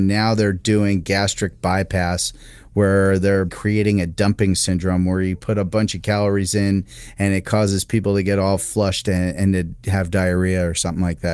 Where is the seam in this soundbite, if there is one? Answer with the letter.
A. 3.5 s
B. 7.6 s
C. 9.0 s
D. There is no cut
A